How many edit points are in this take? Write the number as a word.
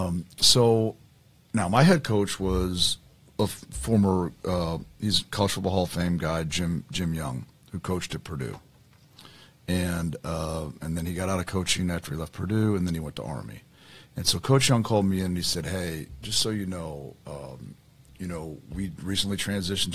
zero